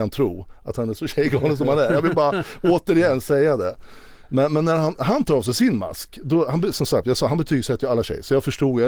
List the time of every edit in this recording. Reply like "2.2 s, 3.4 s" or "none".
none